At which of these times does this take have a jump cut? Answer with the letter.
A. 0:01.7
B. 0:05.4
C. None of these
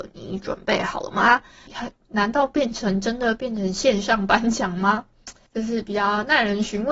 A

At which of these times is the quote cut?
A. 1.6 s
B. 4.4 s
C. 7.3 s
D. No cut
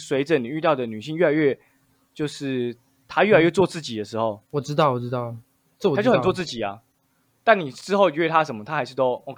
B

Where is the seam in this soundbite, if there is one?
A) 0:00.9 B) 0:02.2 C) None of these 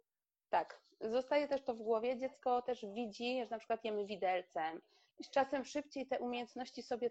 C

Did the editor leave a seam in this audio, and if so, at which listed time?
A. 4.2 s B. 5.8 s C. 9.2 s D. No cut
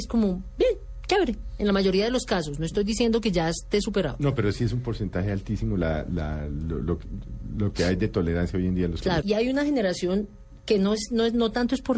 C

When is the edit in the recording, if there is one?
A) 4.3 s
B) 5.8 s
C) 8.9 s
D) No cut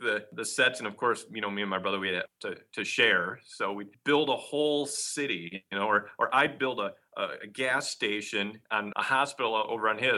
C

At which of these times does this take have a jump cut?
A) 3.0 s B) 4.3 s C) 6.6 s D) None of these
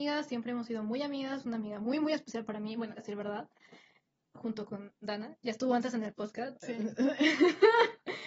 A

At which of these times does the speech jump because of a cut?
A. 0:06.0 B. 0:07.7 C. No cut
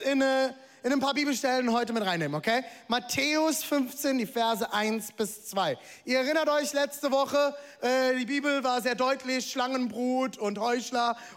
C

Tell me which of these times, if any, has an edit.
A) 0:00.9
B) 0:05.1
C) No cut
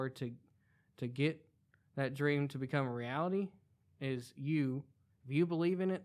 B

